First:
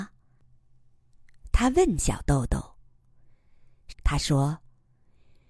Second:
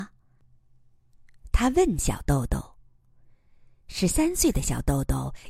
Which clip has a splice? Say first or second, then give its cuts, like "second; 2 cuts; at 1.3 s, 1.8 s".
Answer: first; 1 cut; at 3.9 s